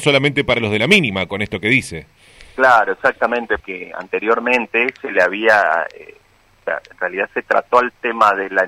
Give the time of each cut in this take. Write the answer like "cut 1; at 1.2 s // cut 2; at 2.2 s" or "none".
cut 1; at 3.6 s